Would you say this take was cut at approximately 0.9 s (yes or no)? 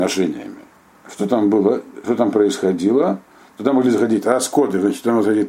yes